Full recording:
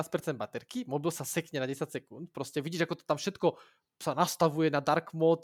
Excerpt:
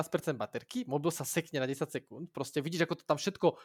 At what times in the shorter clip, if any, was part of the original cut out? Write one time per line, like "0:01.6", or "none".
none